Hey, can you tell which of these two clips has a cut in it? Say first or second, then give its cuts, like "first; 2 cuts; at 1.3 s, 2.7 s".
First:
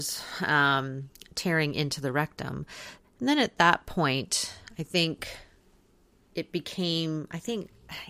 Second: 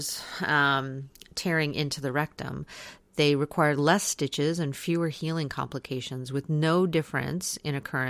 first; 1 cut; at 3.0 s